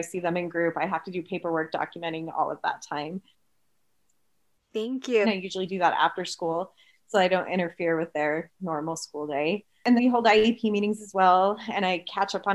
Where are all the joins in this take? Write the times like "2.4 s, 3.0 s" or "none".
5.2 s, 10.0 s